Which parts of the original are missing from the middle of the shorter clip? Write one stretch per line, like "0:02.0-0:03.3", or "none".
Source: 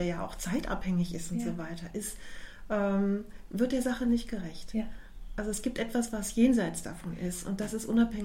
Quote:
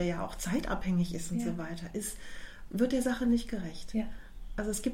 0:02.7-0:03.5